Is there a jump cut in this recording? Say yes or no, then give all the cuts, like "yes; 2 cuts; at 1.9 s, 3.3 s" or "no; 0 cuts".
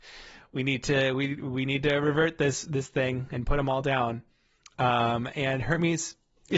no; 0 cuts